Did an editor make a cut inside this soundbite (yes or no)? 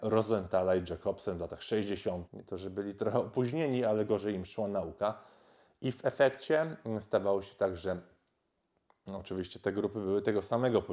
yes